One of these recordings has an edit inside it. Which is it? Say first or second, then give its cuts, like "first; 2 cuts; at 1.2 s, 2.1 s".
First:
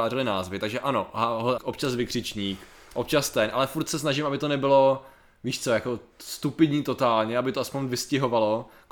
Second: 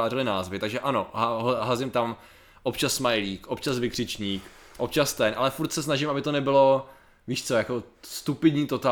first; 1 cut; at 1.6 s